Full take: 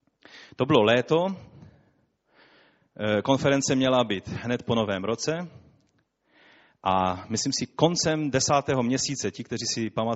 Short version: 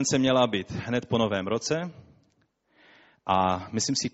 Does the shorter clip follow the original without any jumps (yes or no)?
yes